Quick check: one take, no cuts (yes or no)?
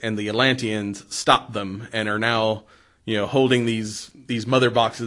yes